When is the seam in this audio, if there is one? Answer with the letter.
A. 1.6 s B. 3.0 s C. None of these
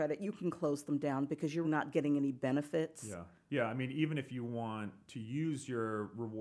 A